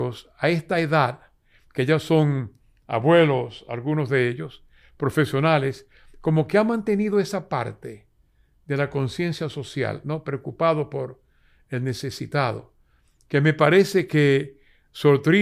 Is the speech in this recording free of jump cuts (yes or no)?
yes